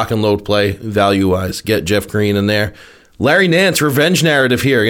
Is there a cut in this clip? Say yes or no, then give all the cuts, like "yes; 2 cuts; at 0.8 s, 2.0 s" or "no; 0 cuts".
no; 0 cuts